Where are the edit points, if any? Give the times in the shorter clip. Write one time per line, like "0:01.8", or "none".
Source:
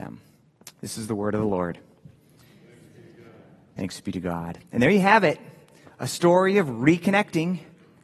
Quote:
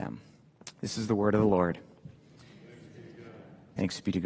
none